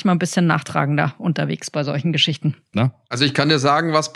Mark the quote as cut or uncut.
cut